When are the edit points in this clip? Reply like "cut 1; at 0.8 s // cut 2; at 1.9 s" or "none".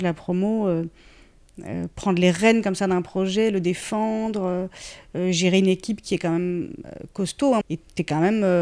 cut 1; at 7.6 s